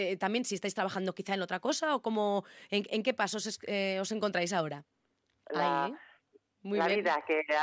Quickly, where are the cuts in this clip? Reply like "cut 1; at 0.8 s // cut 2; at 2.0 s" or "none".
cut 1; at 5.4 s

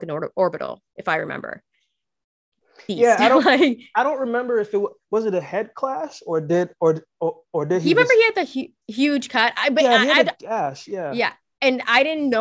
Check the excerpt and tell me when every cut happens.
none

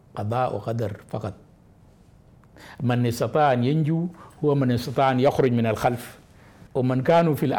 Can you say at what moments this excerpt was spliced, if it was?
cut 1; at 6.7 s

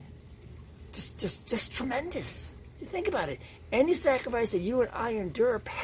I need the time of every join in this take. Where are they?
none

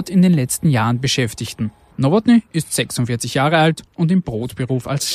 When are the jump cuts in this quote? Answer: cut 1; at 1.9 s

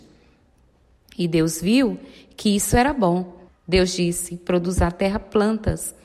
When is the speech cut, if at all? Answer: cut 1; at 3.5 s

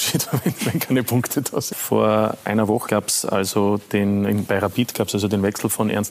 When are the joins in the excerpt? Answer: cut 1; at 1.7 s // cut 2; at 2.9 s

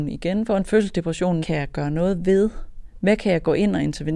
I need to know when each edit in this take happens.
cut 1; at 1.4 s // cut 2; at 3.0 s

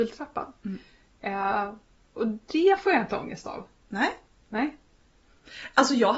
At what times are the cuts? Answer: none

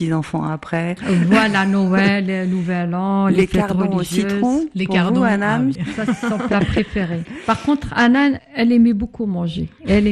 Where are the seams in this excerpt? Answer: none

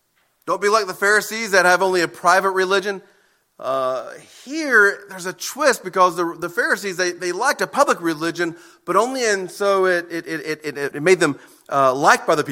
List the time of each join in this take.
cut 1; at 10.9 s

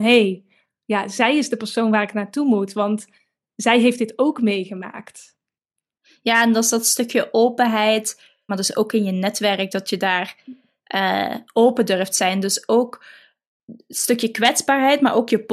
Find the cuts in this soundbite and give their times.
cut 1; at 8.5 s

